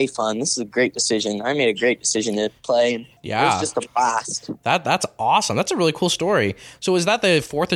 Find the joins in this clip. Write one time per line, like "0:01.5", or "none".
0:03.2